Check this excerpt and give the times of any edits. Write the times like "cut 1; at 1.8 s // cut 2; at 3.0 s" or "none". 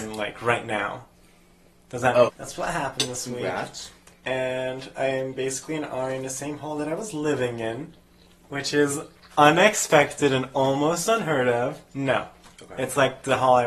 cut 1; at 2.3 s // cut 2; at 4.1 s // cut 3; at 11.9 s